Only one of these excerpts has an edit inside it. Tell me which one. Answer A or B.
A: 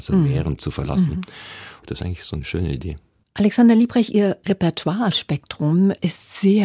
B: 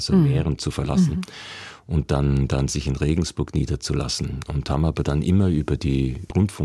A